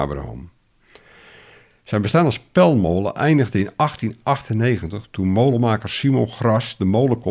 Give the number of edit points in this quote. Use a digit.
0